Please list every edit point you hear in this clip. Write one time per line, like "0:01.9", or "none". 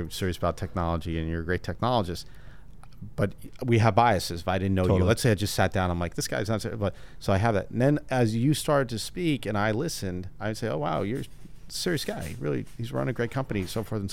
none